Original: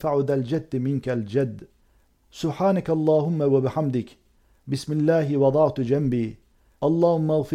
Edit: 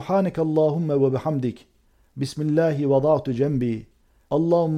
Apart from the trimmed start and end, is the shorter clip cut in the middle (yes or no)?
no